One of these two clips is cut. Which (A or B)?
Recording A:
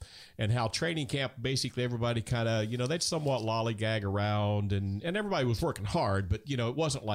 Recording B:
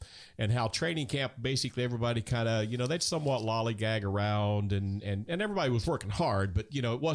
A